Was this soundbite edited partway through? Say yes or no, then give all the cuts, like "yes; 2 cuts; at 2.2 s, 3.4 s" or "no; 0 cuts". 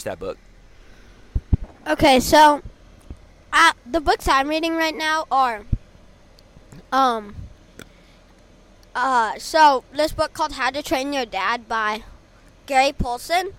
no; 0 cuts